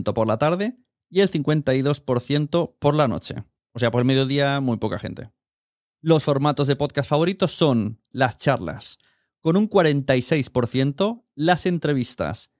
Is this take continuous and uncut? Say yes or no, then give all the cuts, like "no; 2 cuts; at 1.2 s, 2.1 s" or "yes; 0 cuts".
no; 1 cut; at 8.1 s